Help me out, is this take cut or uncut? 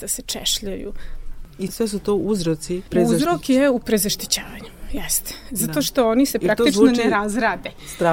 uncut